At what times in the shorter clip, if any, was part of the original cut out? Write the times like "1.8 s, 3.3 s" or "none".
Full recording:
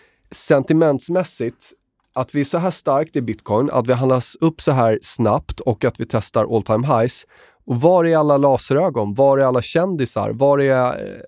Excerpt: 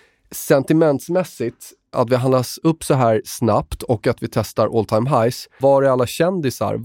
1.9 s, 5.6 s